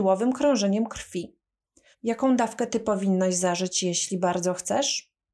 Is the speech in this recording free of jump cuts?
no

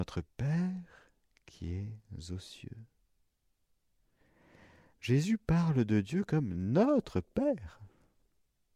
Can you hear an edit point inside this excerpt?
no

